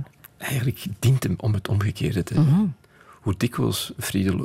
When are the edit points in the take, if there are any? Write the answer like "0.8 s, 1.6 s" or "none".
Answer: none